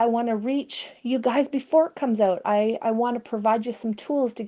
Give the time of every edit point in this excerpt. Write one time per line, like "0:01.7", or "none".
none

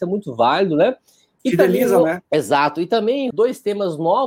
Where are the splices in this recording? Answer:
0:02.3
0:03.3

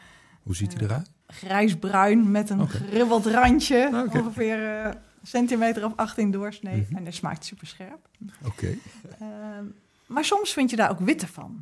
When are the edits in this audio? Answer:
0:01.2

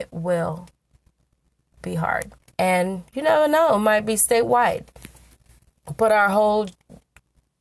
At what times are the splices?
0:02.4

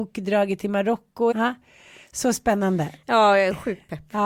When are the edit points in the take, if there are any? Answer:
0:01.3

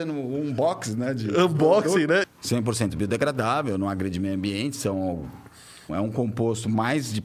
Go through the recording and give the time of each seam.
0:02.2
0:05.9

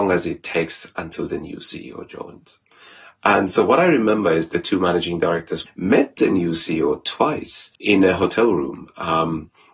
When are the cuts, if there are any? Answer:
0:05.7
0:07.7

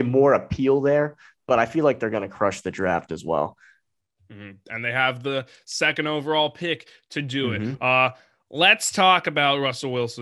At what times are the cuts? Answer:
none

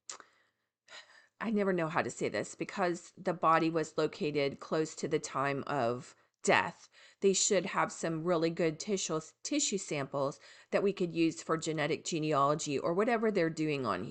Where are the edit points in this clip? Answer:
none

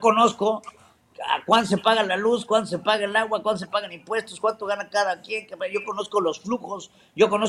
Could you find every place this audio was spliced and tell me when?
none

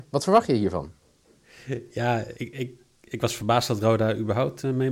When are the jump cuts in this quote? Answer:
0:02.3

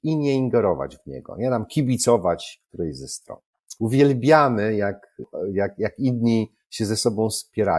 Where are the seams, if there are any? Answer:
0:03.8

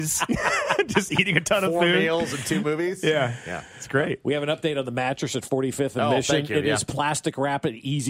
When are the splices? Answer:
none

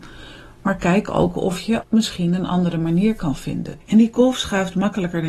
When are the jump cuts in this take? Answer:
0:01.8
0:03.8

